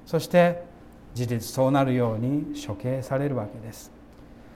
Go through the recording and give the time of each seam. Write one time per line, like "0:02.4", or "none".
0:01.2